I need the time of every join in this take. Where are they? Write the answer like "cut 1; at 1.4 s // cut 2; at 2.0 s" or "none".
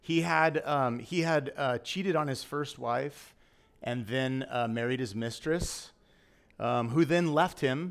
none